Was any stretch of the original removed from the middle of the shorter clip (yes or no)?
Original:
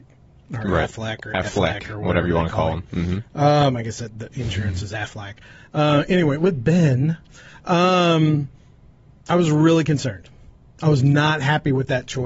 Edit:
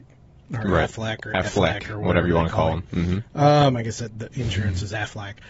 no